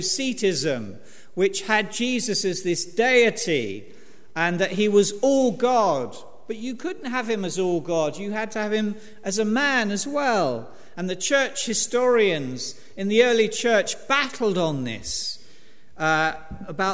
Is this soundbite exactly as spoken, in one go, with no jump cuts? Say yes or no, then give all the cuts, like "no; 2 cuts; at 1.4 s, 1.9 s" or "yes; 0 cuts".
no; 1 cut; at 10.9 s